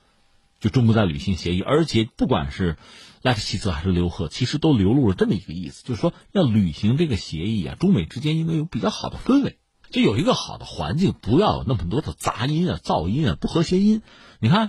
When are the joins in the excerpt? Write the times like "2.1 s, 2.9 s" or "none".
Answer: none